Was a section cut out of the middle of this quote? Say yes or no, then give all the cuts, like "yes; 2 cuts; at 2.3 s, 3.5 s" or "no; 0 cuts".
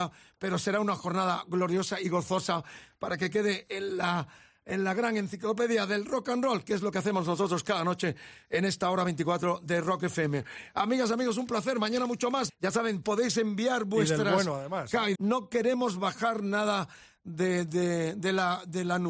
yes; 2 cuts; at 12.5 s, 15.1 s